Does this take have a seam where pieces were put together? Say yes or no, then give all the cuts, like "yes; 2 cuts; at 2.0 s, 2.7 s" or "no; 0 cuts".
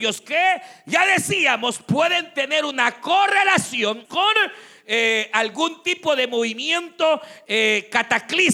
yes; 1 cut; at 4.0 s